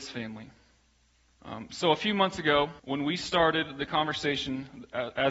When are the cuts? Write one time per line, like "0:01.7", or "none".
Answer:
0:01.3
0:02.8